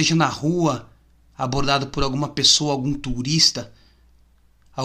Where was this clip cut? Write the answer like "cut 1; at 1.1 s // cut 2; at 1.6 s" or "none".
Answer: none